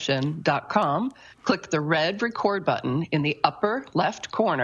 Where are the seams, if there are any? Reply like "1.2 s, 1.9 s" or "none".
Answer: none